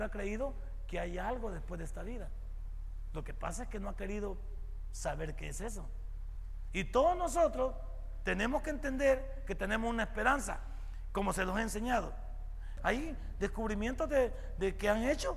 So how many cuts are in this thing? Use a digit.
1